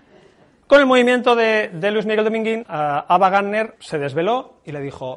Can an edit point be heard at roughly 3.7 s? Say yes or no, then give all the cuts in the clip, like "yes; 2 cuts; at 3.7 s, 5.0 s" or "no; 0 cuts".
yes; 2 cuts; at 2.6 s, 3.7 s